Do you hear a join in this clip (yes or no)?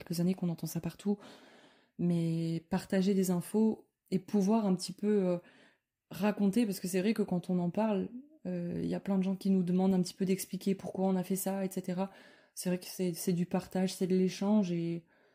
no